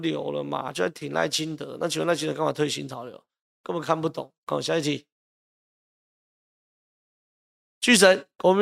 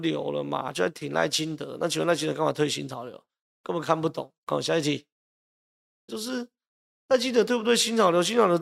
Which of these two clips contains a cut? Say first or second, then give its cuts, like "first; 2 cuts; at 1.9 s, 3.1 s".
second; 1 cut; at 6.1 s